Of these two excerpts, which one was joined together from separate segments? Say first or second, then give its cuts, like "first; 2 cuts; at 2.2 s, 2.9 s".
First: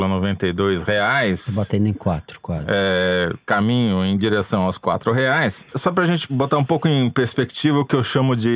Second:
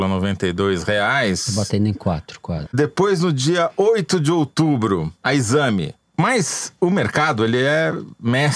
second; 2 cuts; at 2.7 s, 6.0 s